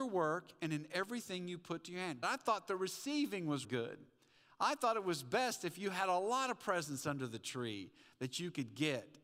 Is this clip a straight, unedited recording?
no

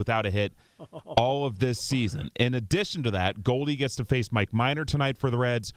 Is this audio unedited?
yes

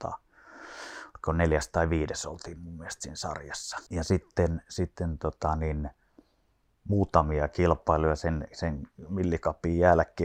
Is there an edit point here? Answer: yes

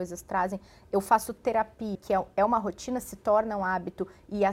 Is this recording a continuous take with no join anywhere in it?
no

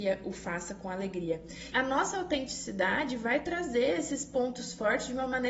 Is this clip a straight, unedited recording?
no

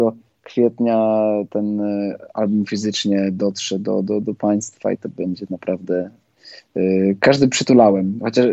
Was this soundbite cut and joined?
yes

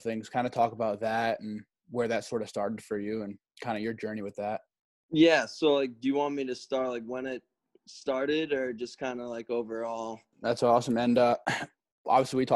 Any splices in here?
yes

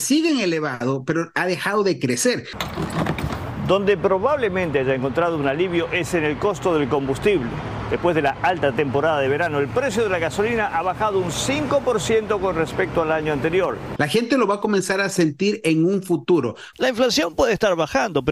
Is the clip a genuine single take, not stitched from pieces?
no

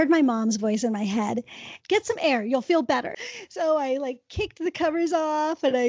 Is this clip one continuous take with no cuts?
no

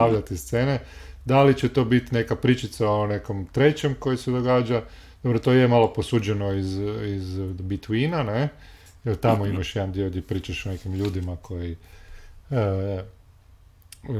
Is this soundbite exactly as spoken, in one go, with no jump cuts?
yes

